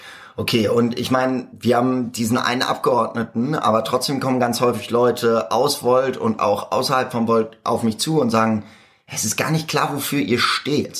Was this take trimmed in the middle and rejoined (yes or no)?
no